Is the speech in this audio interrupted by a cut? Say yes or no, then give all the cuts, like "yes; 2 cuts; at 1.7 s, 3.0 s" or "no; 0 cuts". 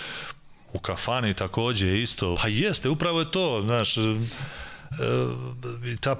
yes; 1 cut; at 2.3 s